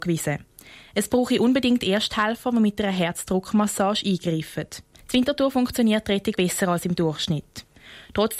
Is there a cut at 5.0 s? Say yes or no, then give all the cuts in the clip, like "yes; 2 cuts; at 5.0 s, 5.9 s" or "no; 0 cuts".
yes; 2 cuts; at 5.0 s, 6.3 s